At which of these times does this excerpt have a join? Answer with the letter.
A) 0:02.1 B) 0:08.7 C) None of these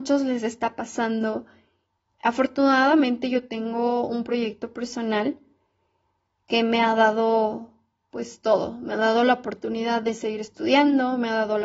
A